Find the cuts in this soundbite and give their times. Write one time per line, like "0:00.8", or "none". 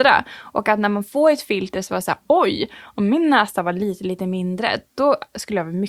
none